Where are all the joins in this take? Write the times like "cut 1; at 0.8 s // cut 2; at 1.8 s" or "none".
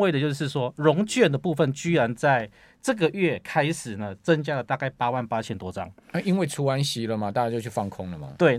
none